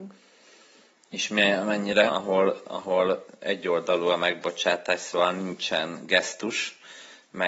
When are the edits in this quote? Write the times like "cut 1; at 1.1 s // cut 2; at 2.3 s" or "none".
cut 1; at 2.1 s